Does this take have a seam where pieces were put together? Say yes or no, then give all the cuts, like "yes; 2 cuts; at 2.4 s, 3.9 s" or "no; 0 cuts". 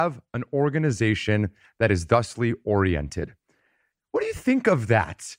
yes; 1 cut; at 3.9 s